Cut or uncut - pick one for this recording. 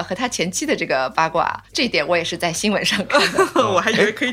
uncut